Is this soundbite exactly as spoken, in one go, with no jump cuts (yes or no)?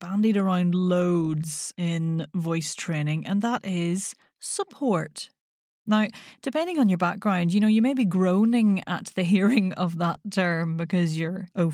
no